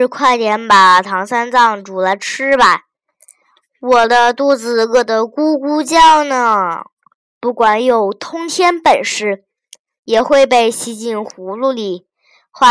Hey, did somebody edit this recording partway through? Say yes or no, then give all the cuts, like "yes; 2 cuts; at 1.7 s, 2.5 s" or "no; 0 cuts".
yes; 1 cut; at 7.3 s